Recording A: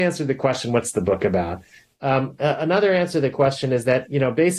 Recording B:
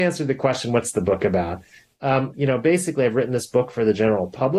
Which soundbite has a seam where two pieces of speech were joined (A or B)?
B